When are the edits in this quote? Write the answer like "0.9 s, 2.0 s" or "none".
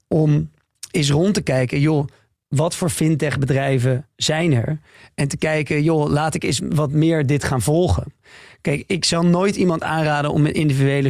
6.6 s